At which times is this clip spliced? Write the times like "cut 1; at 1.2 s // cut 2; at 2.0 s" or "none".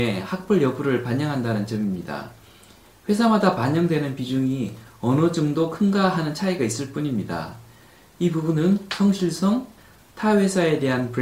cut 1; at 9.8 s